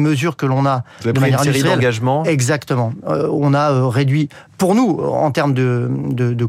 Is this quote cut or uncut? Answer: uncut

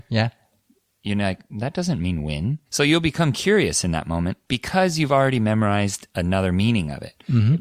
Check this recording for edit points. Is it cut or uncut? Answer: cut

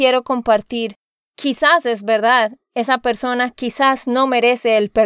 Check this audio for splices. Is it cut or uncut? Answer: cut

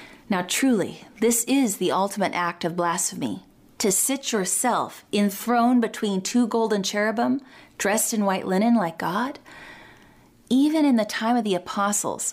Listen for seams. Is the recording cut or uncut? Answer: uncut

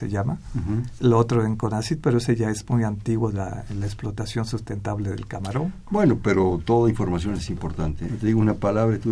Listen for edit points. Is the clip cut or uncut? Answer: cut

